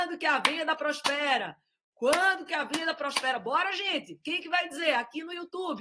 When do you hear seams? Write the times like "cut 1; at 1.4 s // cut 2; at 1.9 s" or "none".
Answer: none